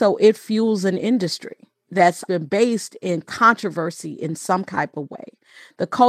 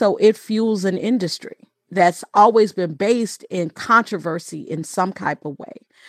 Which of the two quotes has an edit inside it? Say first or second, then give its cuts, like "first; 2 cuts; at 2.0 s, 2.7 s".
first; 1 cut; at 2.3 s